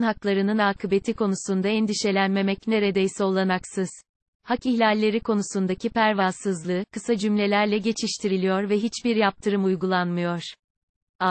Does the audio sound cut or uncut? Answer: cut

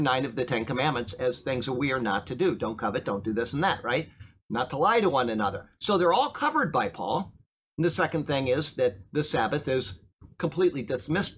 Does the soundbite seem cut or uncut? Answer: uncut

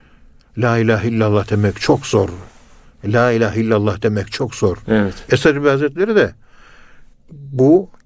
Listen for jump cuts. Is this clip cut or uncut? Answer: cut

